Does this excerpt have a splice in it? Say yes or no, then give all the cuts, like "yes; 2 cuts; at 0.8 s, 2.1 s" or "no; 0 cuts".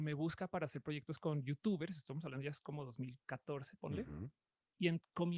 no; 0 cuts